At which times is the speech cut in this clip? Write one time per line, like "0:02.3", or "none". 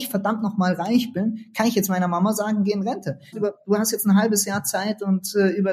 0:03.3